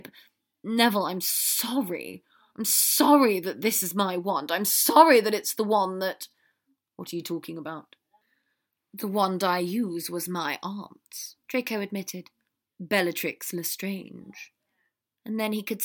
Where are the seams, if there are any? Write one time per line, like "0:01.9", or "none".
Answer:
none